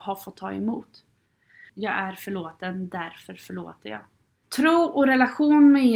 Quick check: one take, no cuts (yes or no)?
no